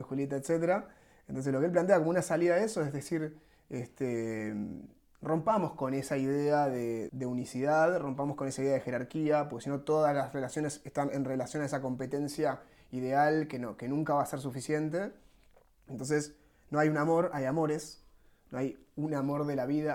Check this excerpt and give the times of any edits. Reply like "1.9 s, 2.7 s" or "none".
7.1 s